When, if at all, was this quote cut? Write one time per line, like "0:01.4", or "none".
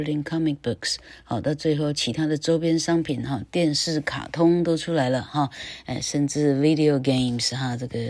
none